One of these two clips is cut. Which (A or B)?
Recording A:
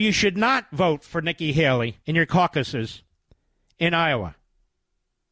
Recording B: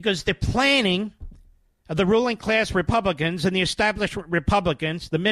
A